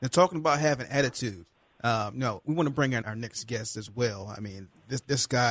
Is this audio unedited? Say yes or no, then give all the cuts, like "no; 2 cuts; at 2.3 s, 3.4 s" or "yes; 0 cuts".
no; 1 cut; at 3.0 s